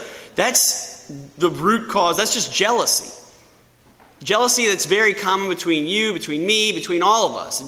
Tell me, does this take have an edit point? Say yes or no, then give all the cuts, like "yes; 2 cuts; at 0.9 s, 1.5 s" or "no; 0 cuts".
no; 0 cuts